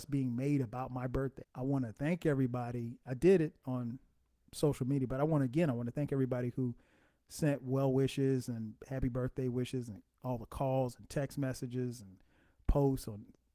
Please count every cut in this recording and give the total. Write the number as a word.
one